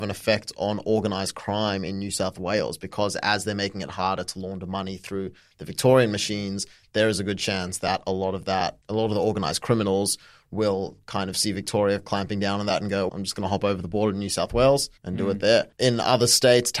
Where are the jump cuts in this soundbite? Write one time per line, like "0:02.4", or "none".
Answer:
0:13.1
0:15.0